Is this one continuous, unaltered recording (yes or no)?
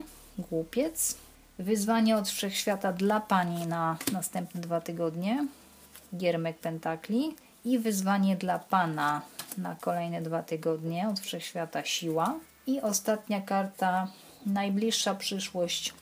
yes